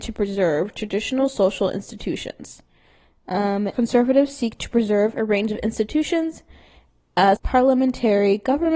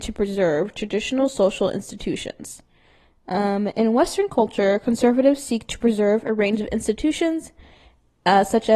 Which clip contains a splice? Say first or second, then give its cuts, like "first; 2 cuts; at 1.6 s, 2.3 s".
first; 2 cuts; at 3.7 s, 7.4 s